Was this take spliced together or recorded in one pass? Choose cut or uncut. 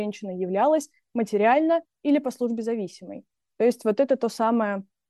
uncut